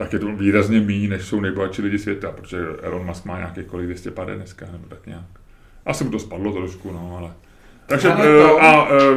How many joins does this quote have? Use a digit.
1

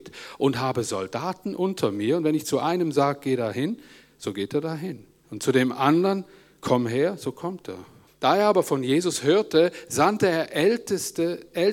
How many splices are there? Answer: 1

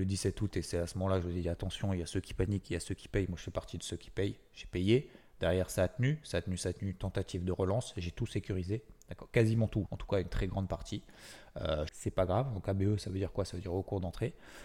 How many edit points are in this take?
2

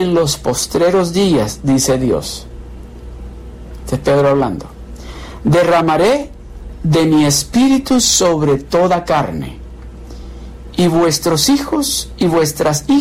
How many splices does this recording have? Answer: 0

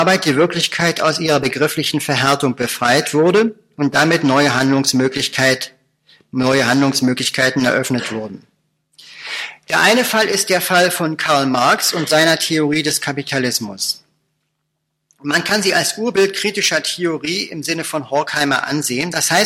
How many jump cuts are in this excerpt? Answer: 0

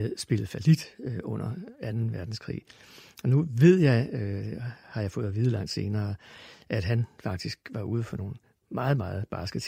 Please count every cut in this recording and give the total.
0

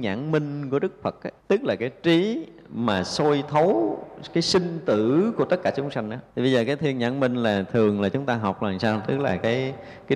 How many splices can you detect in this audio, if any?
2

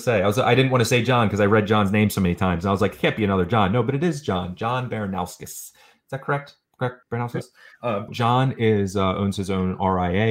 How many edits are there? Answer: 2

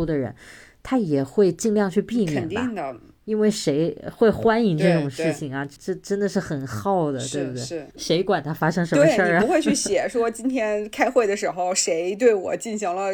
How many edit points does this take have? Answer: 2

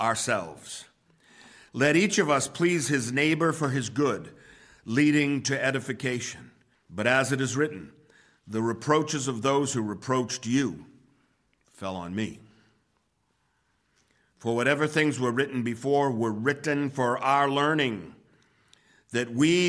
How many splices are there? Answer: 1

